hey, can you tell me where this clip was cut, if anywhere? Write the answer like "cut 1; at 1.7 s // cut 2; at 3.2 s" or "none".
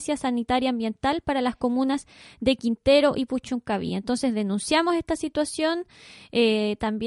none